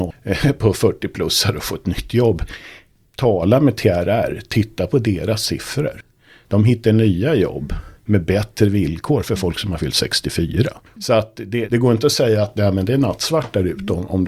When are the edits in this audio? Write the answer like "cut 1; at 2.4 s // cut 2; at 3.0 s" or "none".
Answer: cut 1; at 11.7 s